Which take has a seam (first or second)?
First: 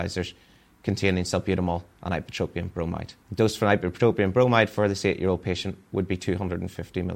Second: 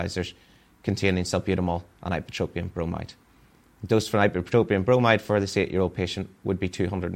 first